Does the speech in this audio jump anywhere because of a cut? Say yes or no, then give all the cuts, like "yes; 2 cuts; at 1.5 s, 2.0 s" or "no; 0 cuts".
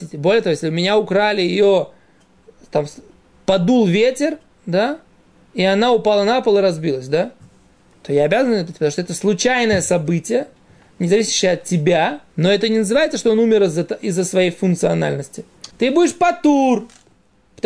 yes; 2 cuts; at 12.3 s, 15.7 s